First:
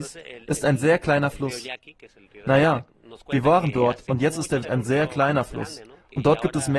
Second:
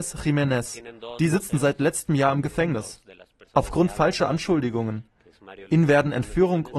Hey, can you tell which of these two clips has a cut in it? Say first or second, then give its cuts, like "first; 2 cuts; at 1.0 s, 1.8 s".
first; 2 cuts; at 2.4 s, 4.6 s